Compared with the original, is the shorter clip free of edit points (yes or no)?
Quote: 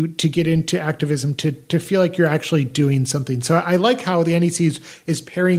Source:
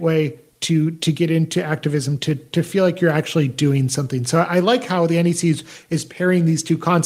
yes